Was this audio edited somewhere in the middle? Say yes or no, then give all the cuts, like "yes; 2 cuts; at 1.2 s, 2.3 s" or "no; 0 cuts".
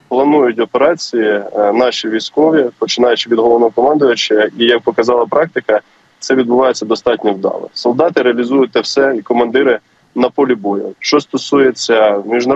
yes; 1 cut; at 10.9 s